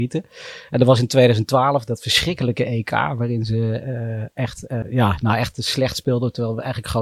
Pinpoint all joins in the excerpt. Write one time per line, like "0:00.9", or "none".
0:04.8